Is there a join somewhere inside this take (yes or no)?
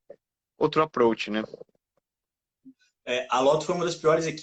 no